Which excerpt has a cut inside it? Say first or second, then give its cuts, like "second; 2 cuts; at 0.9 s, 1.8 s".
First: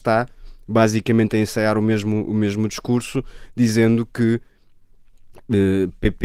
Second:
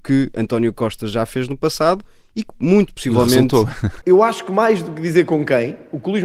second; 1 cut; at 4.0 s